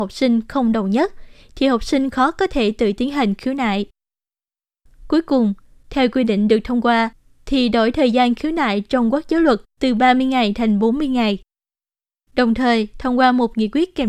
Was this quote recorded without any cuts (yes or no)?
yes